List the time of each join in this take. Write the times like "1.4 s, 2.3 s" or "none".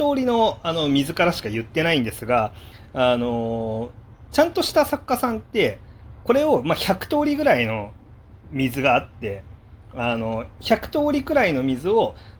none